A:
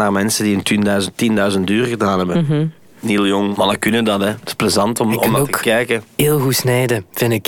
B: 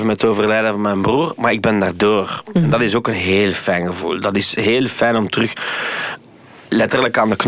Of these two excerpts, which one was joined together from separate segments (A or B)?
A